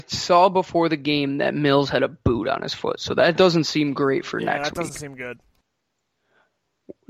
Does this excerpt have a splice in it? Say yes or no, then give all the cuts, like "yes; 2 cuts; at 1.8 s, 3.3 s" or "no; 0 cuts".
no; 0 cuts